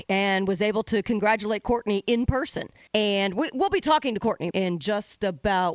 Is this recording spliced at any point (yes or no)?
yes